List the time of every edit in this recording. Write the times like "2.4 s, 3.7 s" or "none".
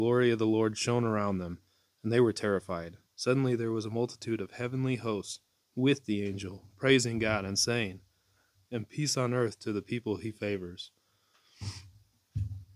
3.1 s, 8.5 s